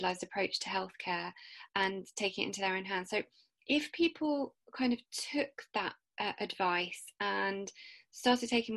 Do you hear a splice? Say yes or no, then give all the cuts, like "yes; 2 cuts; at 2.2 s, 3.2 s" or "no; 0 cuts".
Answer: yes; 1 cut; at 6.0 s